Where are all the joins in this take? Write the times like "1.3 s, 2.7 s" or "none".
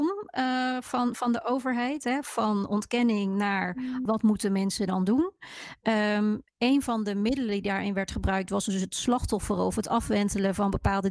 4.1 s